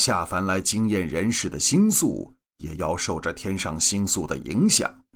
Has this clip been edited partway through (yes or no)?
yes